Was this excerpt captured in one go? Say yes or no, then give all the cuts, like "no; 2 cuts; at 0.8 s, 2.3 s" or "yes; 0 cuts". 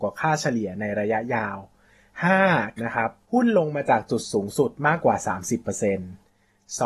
no; 1 cut; at 2.8 s